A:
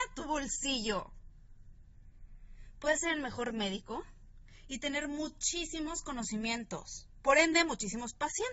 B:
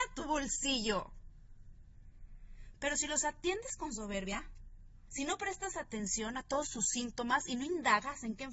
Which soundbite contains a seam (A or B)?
B